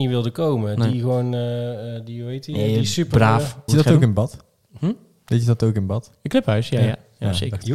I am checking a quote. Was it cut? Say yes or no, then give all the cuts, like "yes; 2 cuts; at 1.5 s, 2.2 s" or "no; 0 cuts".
yes; 1 cut; at 3.7 s